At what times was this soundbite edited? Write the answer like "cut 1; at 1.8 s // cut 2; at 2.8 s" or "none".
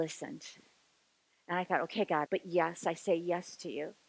cut 1; at 2.2 s